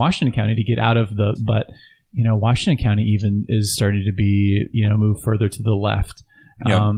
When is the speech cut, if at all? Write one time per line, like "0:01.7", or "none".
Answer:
0:01.3